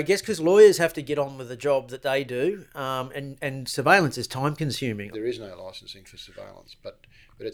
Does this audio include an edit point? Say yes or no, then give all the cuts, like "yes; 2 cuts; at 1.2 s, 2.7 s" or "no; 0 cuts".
yes; 1 cut; at 5.1 s